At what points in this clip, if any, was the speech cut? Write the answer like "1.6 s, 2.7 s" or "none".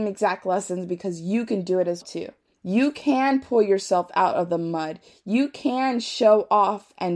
2.0 s